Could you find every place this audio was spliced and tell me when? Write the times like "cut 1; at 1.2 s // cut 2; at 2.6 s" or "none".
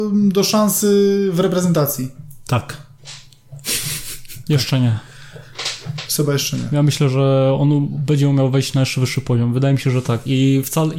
cut 1; at 4.5 s